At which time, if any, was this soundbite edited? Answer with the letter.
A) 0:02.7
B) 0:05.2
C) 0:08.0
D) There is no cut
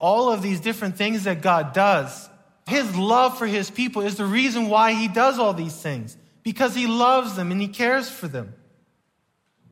A